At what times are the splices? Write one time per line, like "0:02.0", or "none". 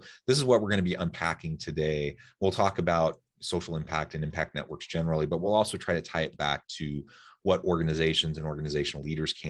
none